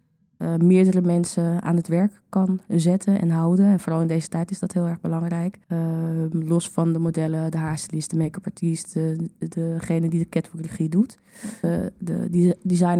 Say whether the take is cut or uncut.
cut